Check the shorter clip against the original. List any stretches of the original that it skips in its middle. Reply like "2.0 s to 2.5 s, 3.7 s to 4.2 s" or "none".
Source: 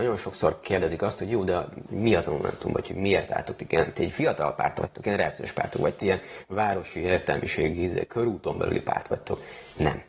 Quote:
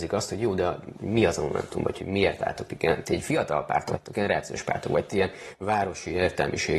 none

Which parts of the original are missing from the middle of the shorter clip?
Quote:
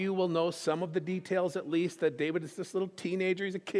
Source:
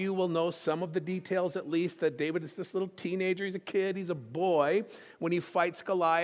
none

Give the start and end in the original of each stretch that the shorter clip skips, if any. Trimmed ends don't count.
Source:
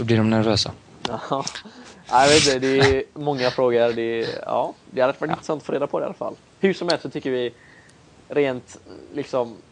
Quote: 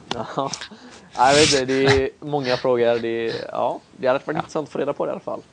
none

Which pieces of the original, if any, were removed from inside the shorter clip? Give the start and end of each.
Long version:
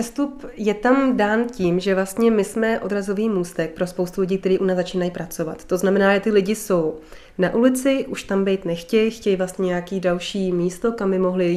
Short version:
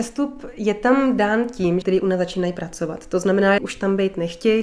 1.8 s to 4.4 s, 6.2 s to 8.1 s

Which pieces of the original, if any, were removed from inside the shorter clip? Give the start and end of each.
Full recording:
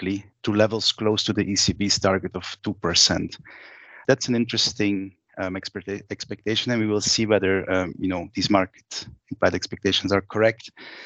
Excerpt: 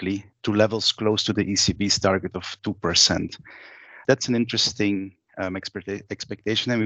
none

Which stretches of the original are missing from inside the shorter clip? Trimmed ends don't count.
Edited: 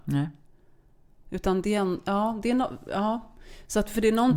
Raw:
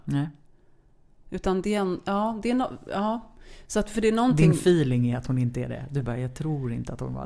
none

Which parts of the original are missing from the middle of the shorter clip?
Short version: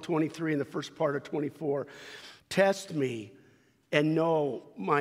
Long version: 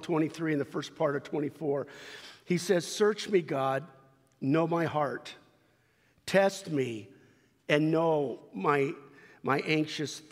2.4 s to 6.2 s

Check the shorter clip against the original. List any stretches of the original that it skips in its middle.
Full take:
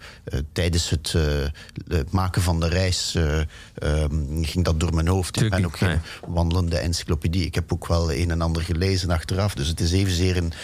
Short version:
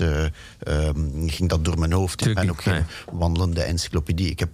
none

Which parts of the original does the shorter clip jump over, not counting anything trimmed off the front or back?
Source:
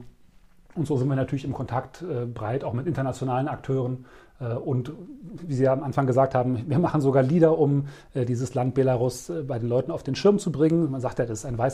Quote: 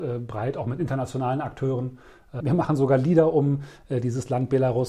4.5 s to 6.7 s

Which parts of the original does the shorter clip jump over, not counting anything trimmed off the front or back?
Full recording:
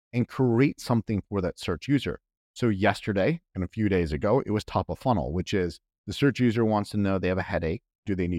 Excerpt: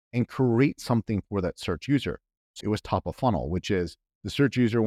2.6 s to 4.4 s

